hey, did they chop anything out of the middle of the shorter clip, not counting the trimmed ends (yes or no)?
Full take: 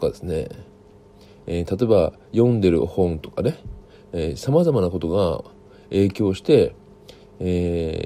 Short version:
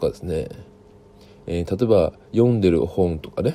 no